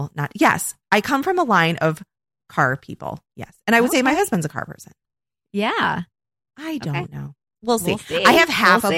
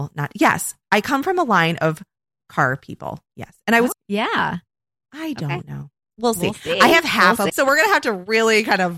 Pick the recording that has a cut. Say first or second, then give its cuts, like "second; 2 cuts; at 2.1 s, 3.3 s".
second; 2 cuts; at 3.9 s, 7.5 s